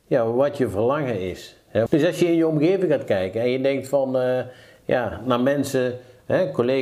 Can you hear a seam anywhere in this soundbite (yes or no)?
yes